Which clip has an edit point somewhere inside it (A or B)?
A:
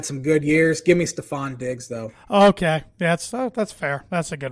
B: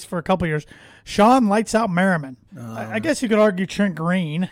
B